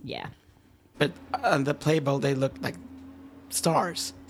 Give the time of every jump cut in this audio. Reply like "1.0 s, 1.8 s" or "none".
0.9 s, 2.5 s